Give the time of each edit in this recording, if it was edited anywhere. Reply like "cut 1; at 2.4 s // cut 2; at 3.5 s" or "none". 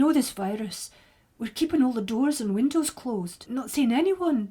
cut 1; at 3.5 s

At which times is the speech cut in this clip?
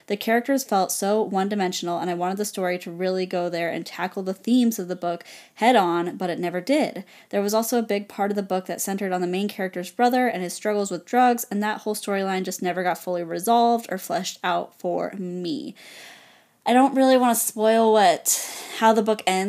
none

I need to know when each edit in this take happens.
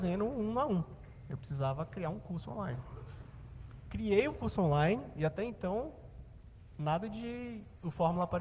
none

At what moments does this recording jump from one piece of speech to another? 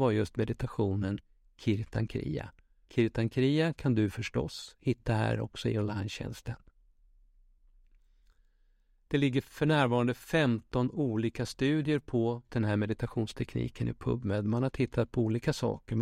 cut 1; at 2.9 s // cut 2; at 12.5 s

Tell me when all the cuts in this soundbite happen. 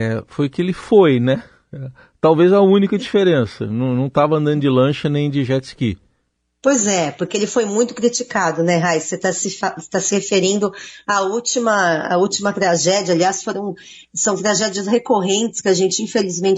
none

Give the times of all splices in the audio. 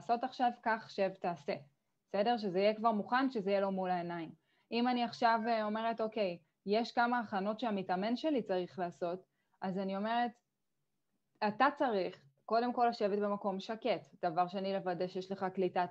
none

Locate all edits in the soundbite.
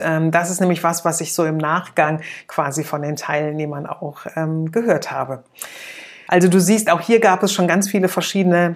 cut 1; at 6.3 s

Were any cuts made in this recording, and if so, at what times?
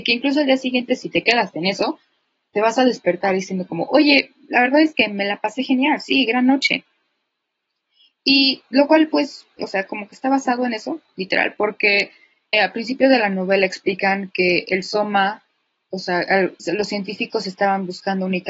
cut 1; at 9.6 s // cut 2; at 12.5 s // cut 3; at 16.6 s

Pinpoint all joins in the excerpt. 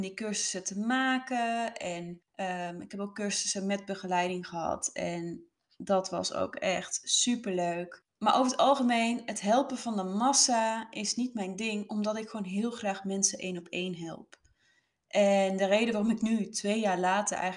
none

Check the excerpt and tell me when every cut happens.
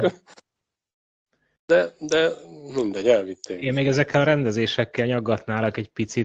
none

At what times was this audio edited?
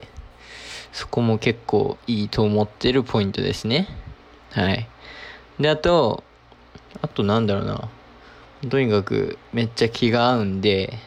cut 1; at 6.9 s

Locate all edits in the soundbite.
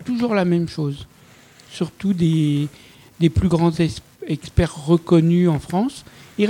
none

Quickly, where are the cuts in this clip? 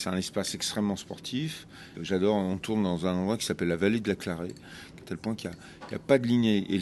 cut 1; at 1.9 s // cut 2; at 5.0 s

